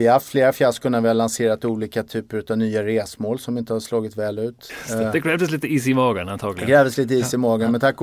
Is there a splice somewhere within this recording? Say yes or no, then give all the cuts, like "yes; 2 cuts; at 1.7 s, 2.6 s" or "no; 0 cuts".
yes; 1 cut; at 4.7 s